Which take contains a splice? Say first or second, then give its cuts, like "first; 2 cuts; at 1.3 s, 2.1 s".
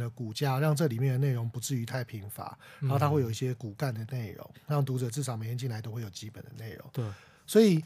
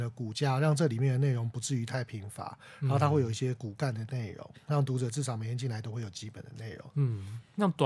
second; 1 cut; at 6.9 s